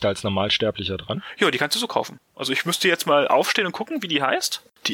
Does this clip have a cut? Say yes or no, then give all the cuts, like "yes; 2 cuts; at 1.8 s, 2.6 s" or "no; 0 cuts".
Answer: no; 0 cuts